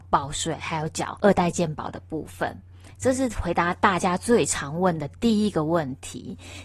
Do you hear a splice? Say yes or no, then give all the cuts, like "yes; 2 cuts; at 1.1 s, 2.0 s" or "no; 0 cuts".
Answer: no; 0 cuts